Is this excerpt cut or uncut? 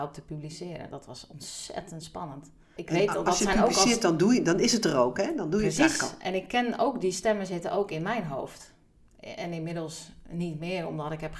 cut